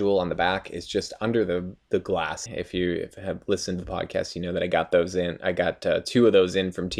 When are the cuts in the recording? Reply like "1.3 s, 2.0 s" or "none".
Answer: 2.5 s